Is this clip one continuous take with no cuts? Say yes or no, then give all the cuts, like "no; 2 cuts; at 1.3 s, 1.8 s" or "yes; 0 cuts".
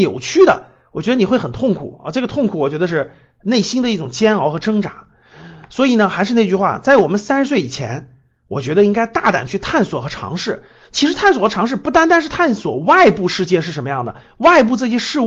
yes; 0 cuts